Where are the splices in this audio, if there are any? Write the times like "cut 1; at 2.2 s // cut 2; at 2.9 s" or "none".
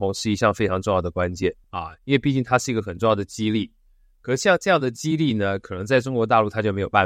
cut 1; at 1.6 s